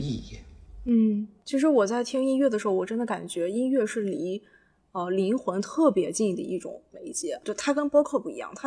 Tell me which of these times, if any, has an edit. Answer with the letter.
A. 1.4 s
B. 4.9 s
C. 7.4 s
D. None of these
D